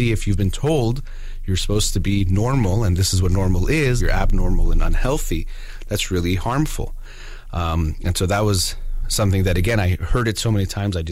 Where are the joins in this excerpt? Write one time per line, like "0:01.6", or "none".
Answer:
0:04.0

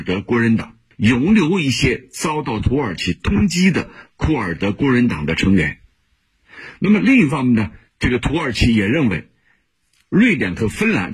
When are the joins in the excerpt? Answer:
0:00.9

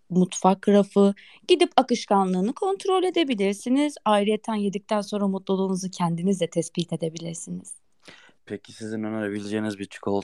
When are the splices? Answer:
none

